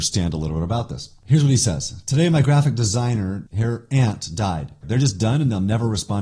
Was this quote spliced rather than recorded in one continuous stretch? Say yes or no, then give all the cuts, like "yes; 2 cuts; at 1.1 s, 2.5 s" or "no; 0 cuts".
yes; 2 cuts; at 3.5 s, 4.8 s